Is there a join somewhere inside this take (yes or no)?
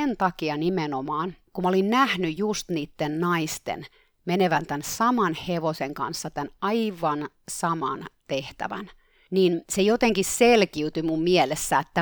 no